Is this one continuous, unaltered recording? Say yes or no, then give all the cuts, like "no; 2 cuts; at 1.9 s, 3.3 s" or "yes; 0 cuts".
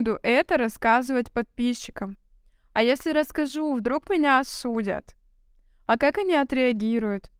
yes; 0 cuts